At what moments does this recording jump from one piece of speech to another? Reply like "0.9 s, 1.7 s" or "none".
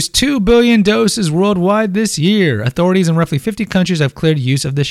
none